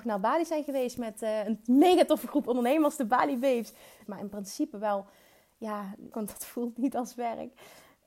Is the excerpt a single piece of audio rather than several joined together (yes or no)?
no